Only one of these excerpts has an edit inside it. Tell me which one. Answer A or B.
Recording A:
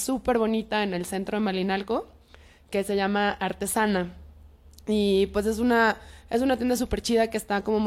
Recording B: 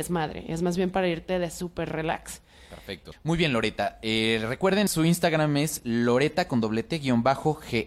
B